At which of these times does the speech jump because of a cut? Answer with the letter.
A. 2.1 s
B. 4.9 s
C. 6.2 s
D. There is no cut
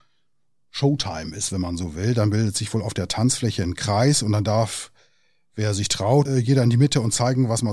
C